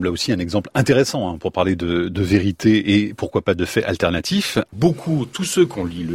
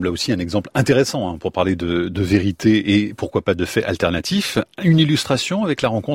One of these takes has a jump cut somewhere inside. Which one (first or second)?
first